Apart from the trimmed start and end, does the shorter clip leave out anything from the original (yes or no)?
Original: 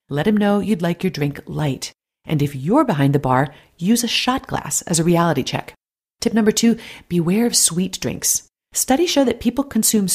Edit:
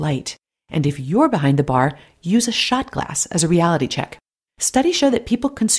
yes